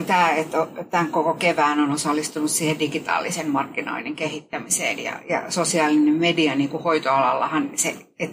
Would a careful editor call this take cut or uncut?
uncut